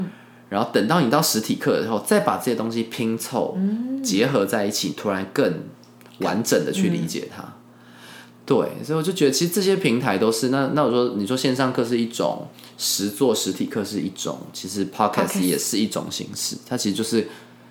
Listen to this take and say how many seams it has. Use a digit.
0